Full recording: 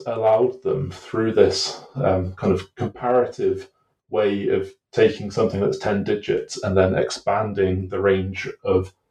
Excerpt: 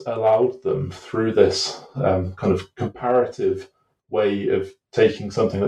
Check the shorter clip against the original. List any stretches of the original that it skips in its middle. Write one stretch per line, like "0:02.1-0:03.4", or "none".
none